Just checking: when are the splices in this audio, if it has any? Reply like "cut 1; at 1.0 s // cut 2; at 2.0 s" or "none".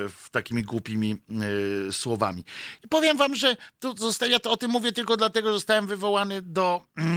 none